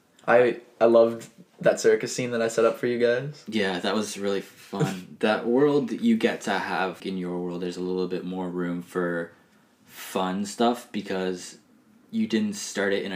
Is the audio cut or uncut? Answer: cut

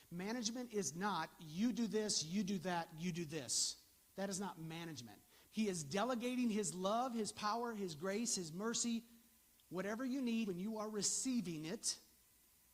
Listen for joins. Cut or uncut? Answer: cut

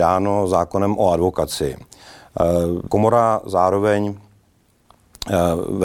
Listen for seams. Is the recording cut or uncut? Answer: cut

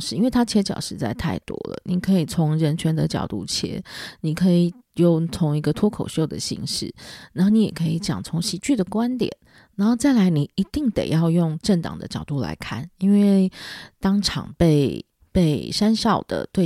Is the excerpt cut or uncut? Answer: uncut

